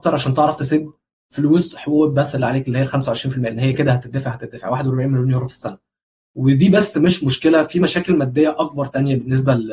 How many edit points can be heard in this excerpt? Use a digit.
1